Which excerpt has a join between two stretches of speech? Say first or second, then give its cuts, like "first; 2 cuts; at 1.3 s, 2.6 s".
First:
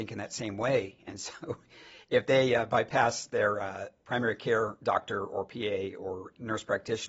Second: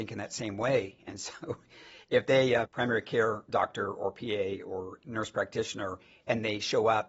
second; 1 cut; at 2.7 s